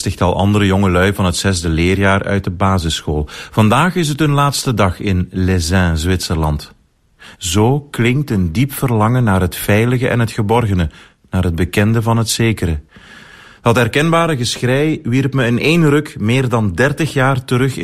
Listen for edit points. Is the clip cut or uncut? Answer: cut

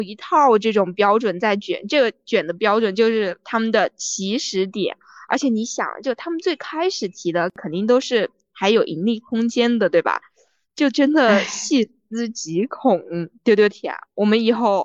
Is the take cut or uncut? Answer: uncut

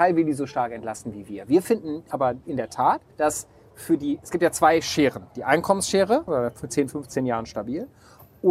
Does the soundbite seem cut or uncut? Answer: cut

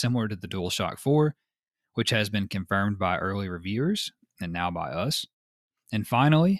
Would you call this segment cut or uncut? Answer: uncut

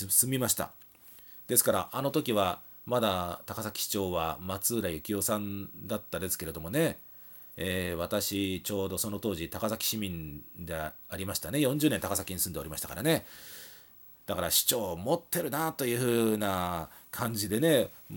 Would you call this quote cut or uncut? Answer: cut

